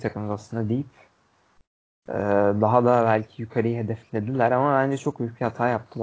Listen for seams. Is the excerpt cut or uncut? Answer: uncut